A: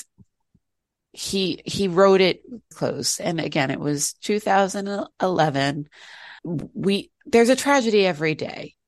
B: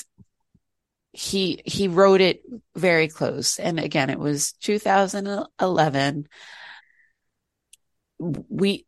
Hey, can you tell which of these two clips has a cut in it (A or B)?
A